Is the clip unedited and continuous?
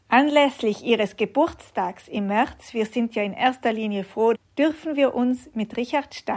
no; 1 cut; at 4.3 s

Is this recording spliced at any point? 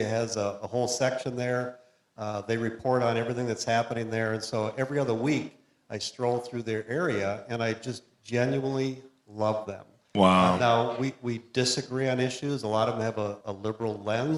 yes; 1 cut; at 13.4 s

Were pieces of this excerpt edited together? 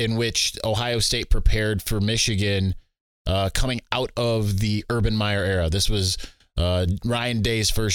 no; 0 cuts

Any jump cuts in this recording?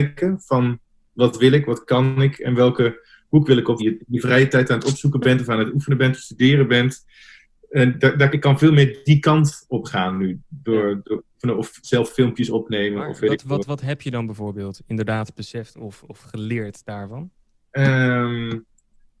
yes; 2 cuts; at 3.8 s, 8.3 s

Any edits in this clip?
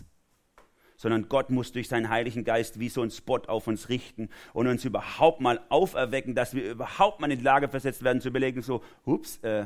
no; 0 cuts

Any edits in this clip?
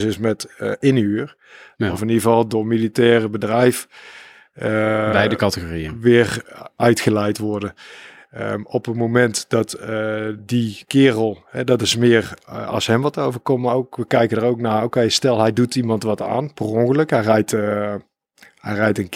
yes; 1 cut; at 1.8 s

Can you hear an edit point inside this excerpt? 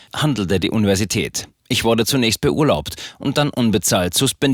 no; 0 cuts

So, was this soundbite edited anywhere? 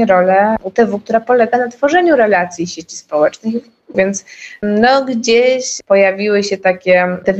yes; 1 cut; at 3.9 s

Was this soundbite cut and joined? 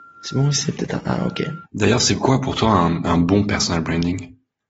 yes; 1 cut; at 1.6 s

